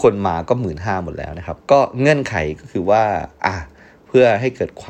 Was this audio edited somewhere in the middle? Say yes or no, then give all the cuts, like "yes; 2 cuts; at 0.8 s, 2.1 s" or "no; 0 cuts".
yes; 1 cut; at 1.6 s